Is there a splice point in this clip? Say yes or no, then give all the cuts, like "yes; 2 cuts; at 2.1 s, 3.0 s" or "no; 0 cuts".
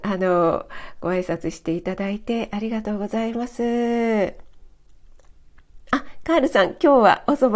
no; 0 cuts